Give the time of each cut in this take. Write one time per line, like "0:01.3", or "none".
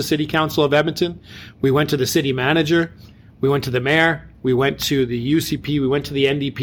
none